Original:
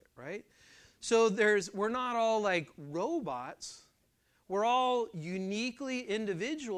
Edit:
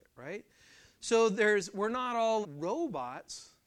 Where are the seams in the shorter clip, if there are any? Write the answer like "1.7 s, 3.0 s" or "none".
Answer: 2.4 s